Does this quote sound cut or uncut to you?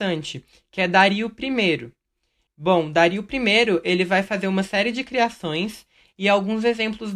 cut